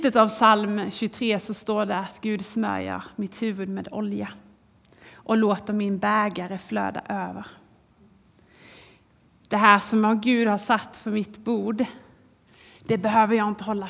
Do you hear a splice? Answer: no; 0 cuts

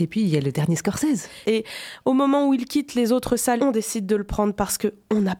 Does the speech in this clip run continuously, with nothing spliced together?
no; 2 cuts; at 1.4 s, 3.6 s

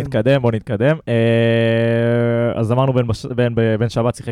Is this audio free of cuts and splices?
yes; 0 cuts

